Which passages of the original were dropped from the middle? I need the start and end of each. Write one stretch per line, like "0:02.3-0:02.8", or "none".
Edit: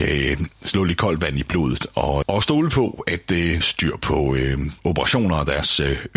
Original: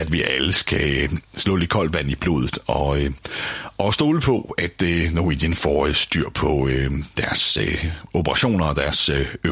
0:02.9-0:03.7
0:05.1-0:05.9
0:07.1-0:08.1